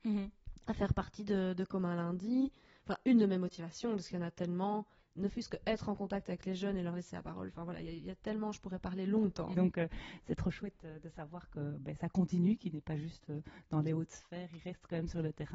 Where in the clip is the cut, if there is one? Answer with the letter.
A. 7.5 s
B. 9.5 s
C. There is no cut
B